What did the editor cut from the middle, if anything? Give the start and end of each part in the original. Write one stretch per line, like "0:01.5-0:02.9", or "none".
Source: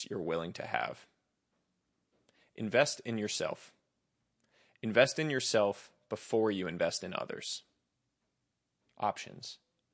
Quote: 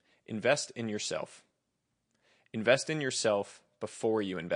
none